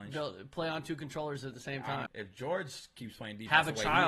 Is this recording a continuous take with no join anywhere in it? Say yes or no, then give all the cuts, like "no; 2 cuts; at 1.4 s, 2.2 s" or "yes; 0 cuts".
no; 1 cut; at 2.1 s